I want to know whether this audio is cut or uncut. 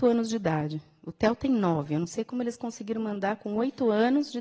uncut